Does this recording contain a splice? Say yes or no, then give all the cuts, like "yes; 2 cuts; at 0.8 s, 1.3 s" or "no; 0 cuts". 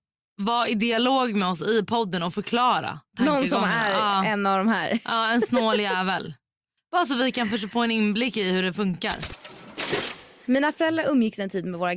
no; 0 cuts